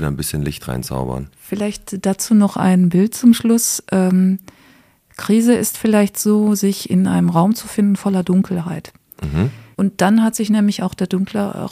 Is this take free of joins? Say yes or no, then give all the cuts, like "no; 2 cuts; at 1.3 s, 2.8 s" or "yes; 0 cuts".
no; 1 cut; at 9.7 s